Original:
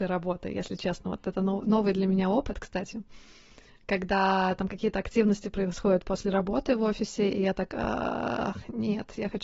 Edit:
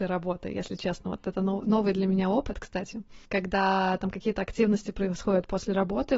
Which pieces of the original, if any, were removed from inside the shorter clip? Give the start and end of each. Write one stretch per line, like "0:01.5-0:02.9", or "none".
0:03.3-0:03.8